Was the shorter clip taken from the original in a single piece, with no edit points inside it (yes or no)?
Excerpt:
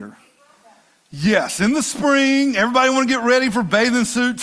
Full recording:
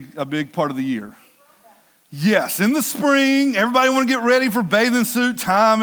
yes